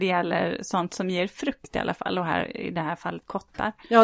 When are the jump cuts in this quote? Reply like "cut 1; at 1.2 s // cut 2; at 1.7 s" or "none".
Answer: none